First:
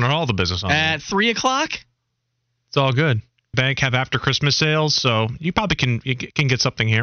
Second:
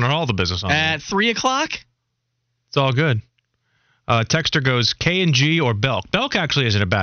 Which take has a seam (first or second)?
first